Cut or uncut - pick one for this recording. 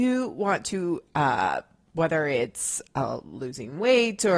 uncut